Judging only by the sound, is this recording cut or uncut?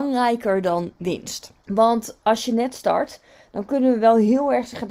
cut